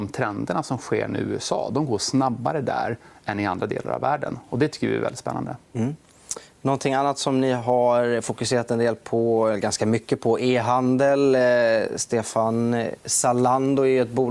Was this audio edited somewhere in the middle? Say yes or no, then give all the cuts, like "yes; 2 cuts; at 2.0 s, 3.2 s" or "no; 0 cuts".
no; 0 cuts